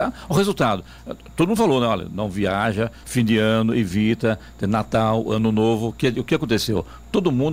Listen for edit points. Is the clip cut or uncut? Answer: cut